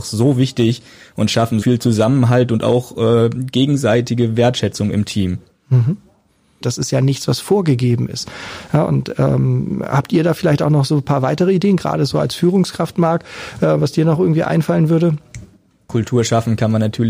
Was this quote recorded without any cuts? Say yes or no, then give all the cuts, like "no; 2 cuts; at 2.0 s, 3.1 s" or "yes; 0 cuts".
no; 2 cuts; at 1.6 s, 6.6 s